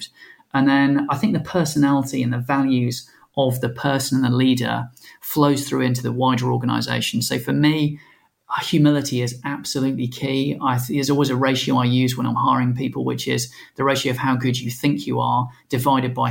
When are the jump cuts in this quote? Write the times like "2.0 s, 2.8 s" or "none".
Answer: none